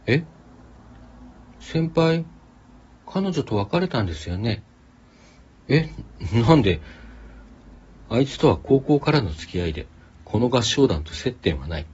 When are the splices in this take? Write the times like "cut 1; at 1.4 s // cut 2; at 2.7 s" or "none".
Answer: none